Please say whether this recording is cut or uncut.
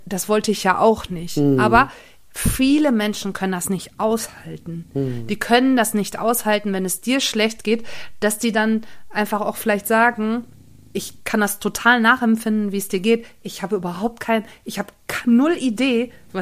uncut